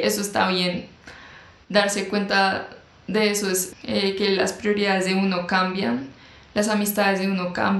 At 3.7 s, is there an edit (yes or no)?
yes